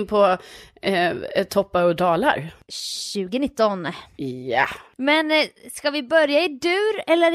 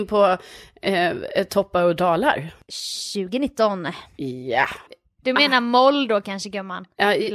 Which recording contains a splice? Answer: second; 1 cut; at 4.9 s

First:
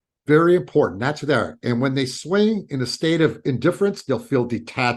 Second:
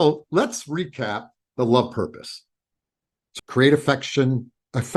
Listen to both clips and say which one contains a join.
second; 1 cut; at 3.4 s

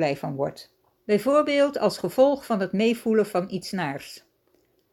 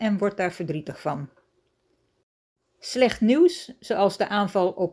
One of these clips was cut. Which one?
first; 1 cut; at 1.0 s

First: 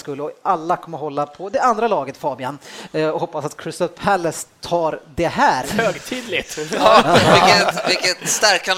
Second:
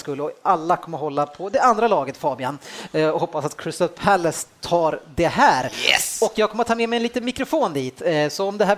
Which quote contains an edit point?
first; 1 cut; at 5.6 s

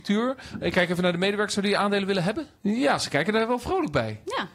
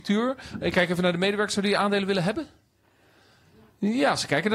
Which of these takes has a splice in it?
first; 1 cut; at 2.6 s

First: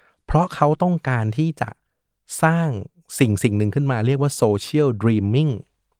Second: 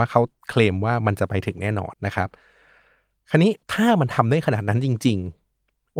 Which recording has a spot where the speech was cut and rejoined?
second; 2 cuts; at 1.9 s, 3.6 s

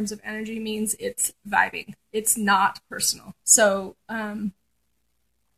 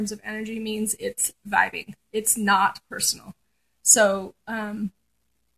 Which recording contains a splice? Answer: first; 1 cut; at 3.4 s

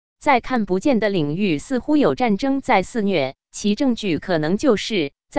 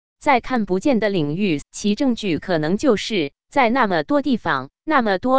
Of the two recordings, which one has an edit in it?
second; 1 cut; at 1.6 s

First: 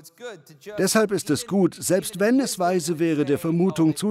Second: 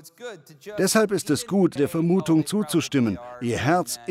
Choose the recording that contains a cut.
second; 1 cut; at 1.8 s

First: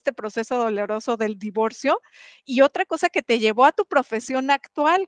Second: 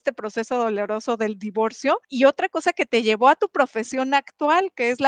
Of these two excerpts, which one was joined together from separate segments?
second; 1 cut; at 2.0 s

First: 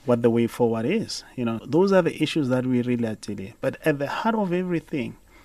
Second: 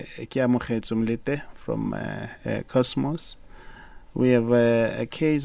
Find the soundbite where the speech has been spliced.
first; 1 cut; at 1.6 s

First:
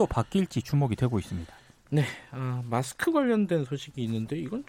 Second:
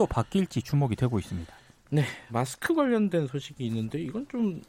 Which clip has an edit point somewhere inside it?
second; 1 cut; at 2.3 s

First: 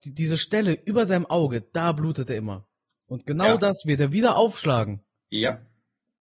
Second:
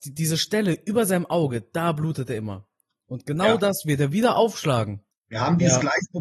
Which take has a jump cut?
second; 1 cut; at 5.1 s

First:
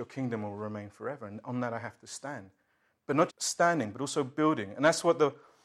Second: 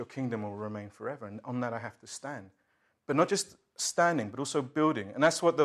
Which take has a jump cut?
first; 1 cut; at 3.3 s

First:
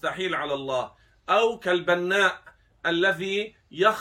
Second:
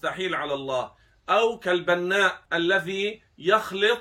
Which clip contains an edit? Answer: second; 1 cut; at 2.5 s

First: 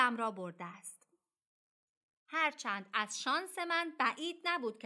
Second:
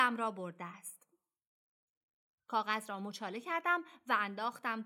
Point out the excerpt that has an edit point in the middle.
first; 1 cut; at 2.2 s

